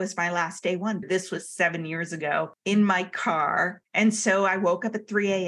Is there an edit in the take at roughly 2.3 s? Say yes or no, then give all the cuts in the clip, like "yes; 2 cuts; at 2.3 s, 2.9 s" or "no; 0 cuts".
no; 2 cuts; at 1.0 s, 3.8 s